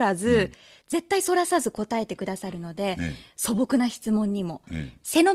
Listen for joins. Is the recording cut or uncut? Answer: uncut